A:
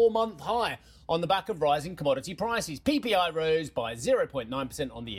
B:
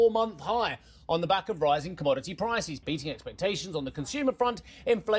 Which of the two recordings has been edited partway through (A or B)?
B